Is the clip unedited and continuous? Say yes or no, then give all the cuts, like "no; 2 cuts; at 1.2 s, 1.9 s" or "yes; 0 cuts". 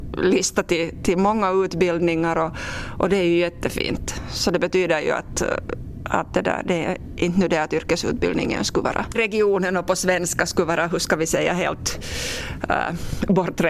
no; 1 cut; at 9.1 s